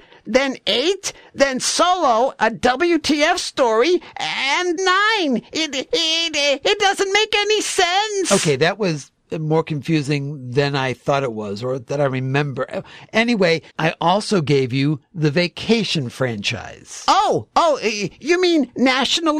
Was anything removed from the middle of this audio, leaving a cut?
yes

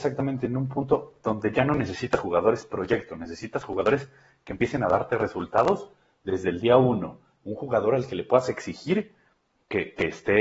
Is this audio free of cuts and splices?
yes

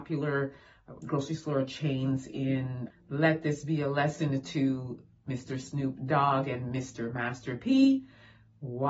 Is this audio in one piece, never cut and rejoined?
no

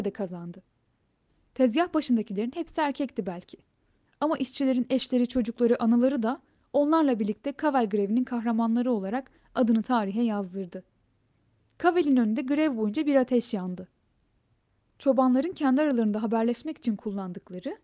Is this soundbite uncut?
yes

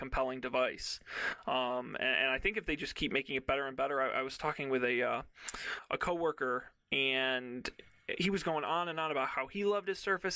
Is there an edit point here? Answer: no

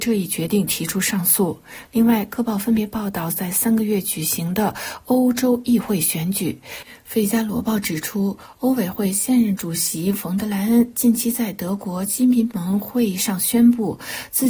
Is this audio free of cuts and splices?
no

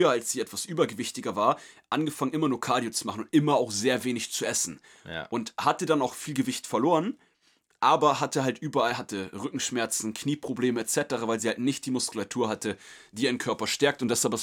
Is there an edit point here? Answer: no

